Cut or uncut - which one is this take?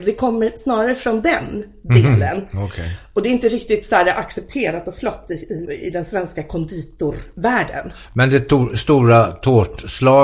cut